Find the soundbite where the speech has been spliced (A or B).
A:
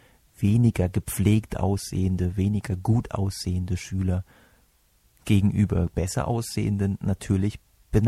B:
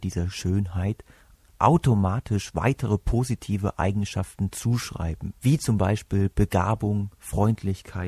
B